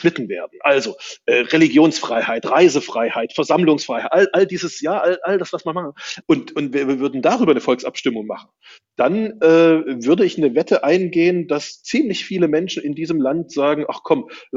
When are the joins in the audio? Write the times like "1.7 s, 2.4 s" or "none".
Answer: 6.2 s